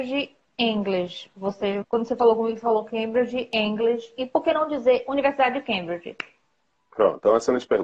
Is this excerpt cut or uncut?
cut